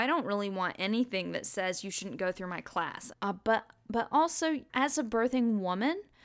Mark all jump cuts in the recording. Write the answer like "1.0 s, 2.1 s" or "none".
3.1 s, 4.7 s

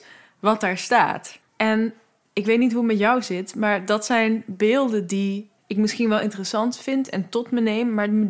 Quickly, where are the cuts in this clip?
1.5 s, 5.6 s

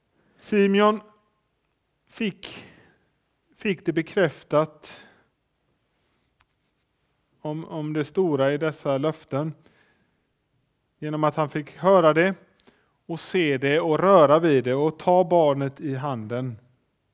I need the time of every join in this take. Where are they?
none

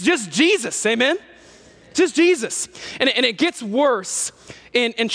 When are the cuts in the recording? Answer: none

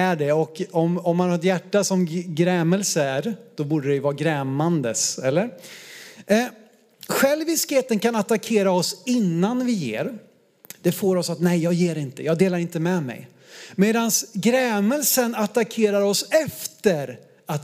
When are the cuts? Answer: none

